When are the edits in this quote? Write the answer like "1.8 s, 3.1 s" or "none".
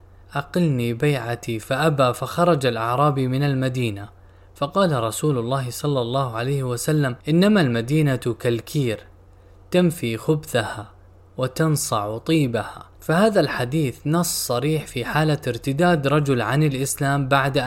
7.2 s, 13.0 s